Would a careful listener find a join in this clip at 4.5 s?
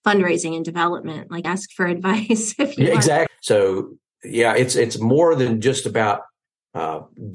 no; 2 cuts; at 1.4 s, 3.3 s

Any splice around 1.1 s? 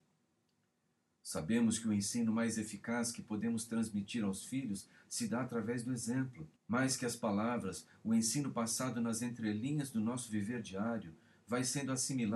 no; 1 cut; at 6.6 s

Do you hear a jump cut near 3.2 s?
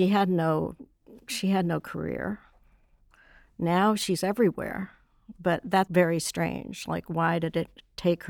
no; 1 cut; at 5.9 s

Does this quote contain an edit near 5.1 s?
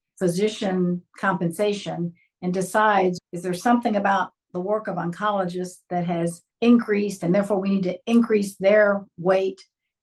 no; 2 cuts; at 3.2 s, 6.5 s

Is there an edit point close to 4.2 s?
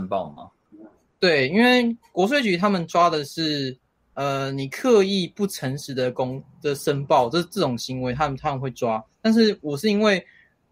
no; 0 cuts

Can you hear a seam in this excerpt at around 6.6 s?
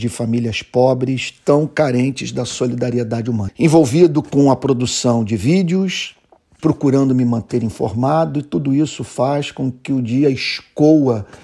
yes; 2 cuts; at 3.5 s, 6.6 s

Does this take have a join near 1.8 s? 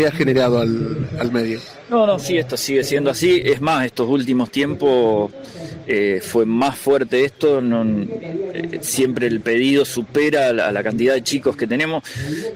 no; 0 cuts

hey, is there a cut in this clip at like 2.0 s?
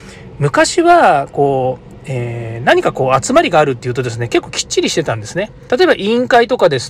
no; 1 cut; at 5.7 s

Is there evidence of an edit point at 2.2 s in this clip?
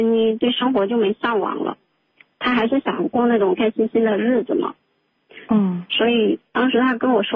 no; 1 cut; at 3.6 s

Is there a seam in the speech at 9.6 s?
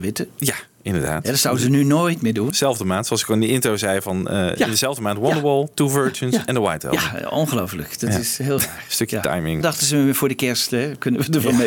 yes; 1 cut; at 9.6 s

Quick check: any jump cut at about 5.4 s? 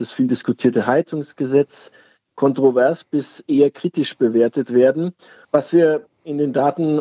yes; 1 cut; at 5.4 s

